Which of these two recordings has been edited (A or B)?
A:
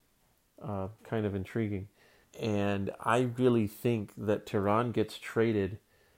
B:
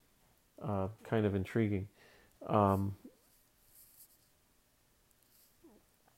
A